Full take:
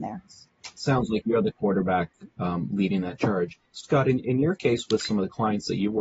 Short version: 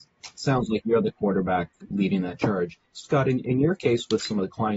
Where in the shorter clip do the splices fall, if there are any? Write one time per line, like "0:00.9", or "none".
0:01.9